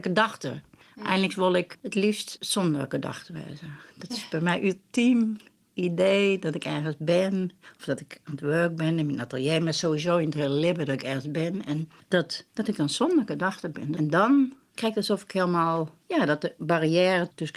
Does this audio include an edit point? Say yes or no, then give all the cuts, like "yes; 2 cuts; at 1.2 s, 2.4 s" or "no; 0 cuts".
yes; 1 cut; at 12.5 s